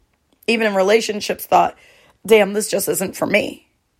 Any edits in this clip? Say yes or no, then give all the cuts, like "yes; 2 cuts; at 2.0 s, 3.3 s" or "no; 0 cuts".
no; 0 cuts